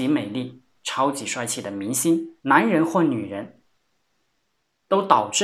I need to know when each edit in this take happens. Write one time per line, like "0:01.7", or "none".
0:02.4